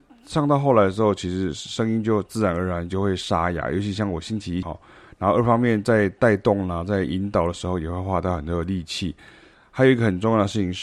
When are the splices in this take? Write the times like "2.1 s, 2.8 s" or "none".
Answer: 4.6 s

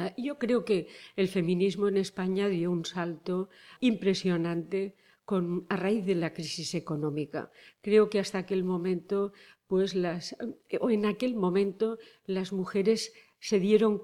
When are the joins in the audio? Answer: 3.8 s

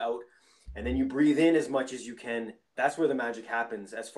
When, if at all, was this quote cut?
2.7 s

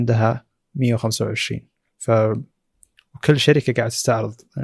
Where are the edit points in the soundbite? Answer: none

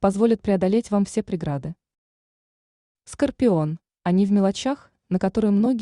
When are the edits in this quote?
3.9 s

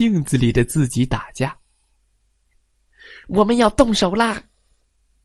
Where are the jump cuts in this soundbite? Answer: 3.2 s

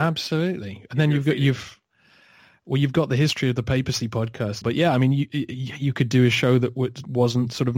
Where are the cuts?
4.6 s

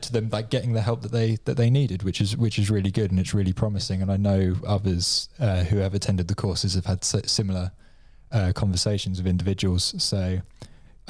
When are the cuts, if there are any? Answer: none

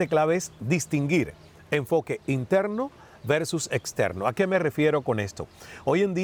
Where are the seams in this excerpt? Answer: none

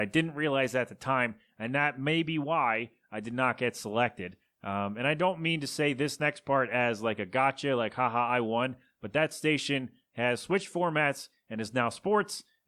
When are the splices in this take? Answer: none

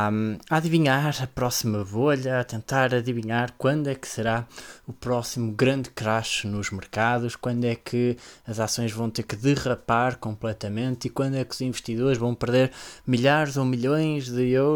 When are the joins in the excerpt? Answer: none

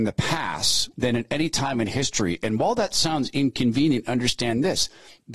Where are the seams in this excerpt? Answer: 0.9 s

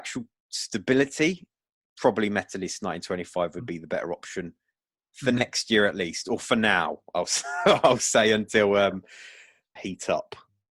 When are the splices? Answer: 9.8 s

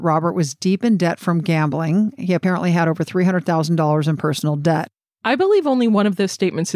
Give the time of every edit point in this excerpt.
5.0 s

